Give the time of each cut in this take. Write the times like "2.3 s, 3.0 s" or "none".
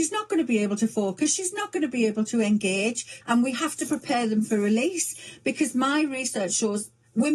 3.2 s